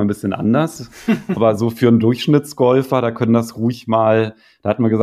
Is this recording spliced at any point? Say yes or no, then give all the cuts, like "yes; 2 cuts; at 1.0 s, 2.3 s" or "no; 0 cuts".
no; 0 cuts